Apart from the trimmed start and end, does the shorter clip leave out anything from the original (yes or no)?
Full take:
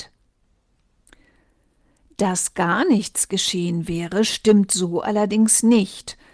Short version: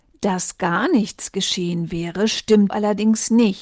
yes